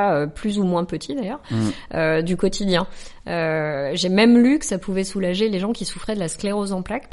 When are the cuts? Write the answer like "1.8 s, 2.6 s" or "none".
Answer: none